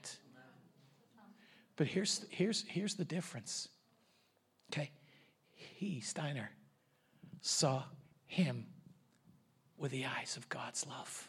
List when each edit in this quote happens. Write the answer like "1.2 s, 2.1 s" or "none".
none